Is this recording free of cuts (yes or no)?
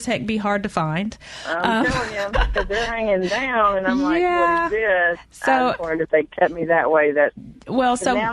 yes